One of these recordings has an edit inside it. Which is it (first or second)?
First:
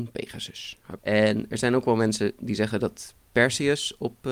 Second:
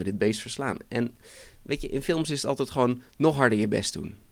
first